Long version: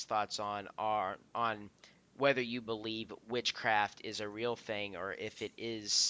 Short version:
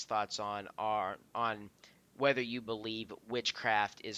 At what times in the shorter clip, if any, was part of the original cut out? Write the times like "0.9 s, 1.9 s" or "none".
none